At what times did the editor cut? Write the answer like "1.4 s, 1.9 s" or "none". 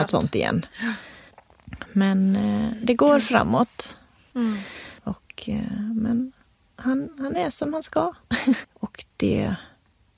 4.3 s, 8.6 s